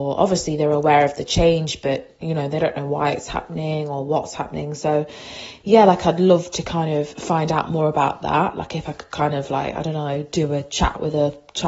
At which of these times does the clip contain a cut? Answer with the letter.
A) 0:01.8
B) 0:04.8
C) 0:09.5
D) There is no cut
D